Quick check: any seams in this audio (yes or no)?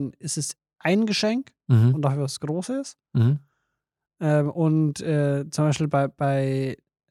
no